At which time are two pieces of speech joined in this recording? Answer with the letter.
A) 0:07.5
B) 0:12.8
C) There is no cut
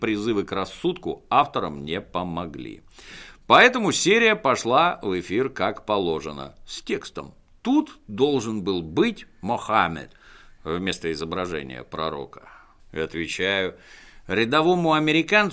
B